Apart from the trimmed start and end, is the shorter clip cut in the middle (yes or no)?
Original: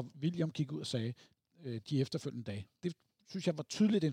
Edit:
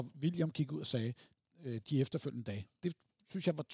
no